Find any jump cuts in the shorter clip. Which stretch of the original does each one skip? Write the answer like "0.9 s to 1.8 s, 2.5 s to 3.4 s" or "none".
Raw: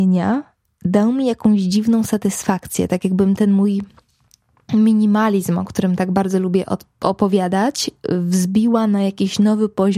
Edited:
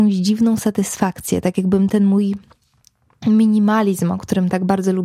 none